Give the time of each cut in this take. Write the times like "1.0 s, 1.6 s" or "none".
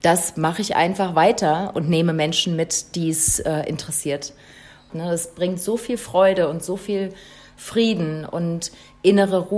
4.9 s